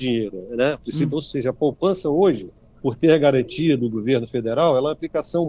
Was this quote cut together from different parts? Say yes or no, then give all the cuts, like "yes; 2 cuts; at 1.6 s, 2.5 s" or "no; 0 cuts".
yes; 2 cuts; at 1.1 s, 2.8 s